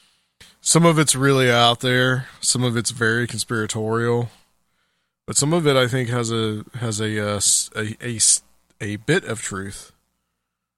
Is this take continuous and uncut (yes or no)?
yes